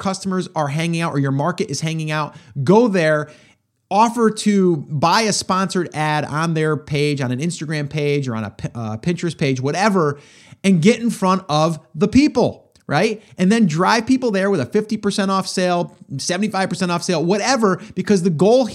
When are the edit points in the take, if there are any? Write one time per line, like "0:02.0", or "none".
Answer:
none